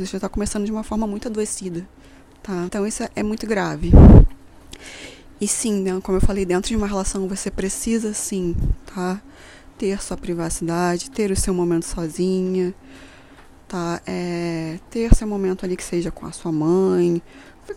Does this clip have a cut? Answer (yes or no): yes